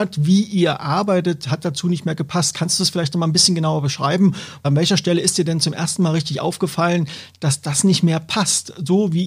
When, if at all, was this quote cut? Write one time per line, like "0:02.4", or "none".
none